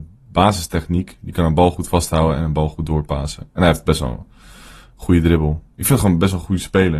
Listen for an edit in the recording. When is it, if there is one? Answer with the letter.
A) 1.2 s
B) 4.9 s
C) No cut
C